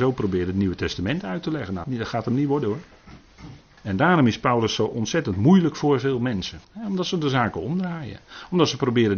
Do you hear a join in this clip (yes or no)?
yes